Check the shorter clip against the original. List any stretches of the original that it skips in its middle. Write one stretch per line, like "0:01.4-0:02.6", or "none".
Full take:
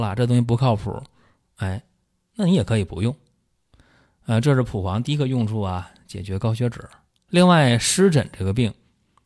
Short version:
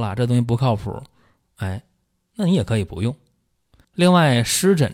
0:03.8-0:07.2